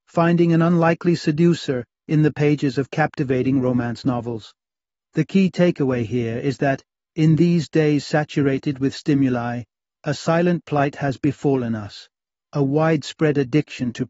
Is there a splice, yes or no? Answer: yes